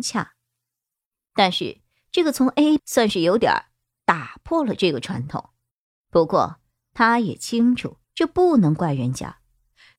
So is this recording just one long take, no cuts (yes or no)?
no